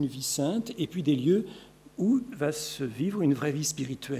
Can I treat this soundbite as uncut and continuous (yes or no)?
yes